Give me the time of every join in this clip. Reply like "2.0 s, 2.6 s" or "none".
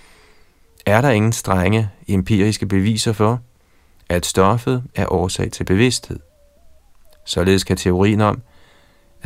none